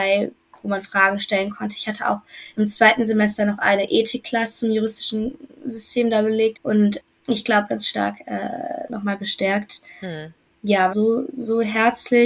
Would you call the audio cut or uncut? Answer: cut